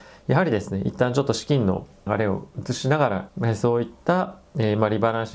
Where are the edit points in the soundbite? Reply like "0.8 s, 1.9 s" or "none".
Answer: 2.1 s, 3.3 s